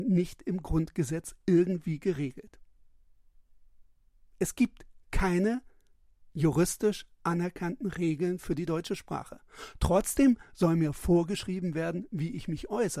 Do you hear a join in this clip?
no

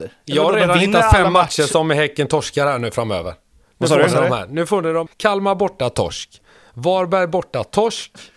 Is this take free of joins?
no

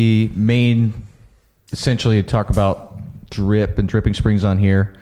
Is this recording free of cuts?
yes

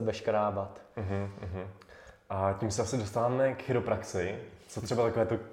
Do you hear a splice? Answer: no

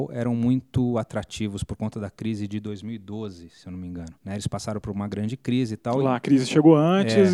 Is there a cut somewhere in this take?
yes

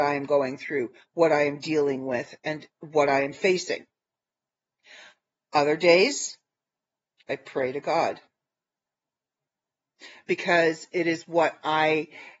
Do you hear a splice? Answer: no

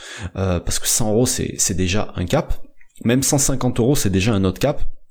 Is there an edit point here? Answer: no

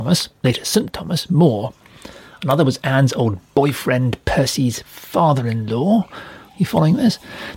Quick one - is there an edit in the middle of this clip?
no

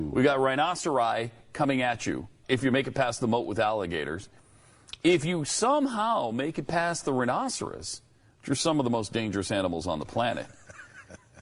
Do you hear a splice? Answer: yes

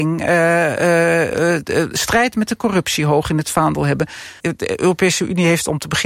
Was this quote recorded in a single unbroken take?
no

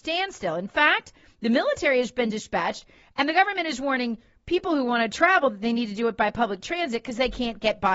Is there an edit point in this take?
no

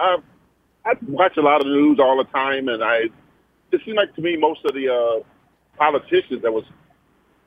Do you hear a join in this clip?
yes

